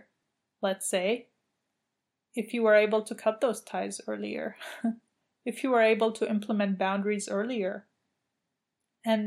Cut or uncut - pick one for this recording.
uncut